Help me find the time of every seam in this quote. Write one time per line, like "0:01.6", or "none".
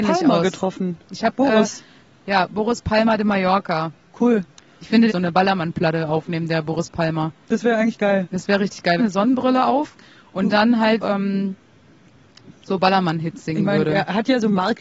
0:05.1
0:09.0
0:11.0